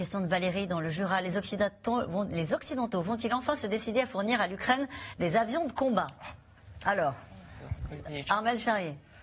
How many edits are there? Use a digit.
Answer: 0